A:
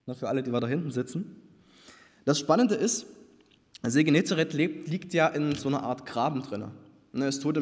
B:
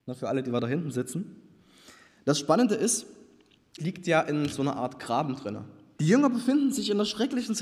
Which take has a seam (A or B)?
B